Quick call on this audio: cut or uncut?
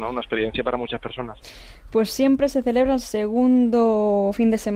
cut